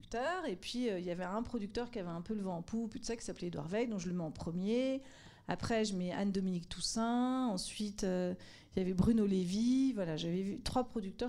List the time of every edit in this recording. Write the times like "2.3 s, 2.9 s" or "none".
none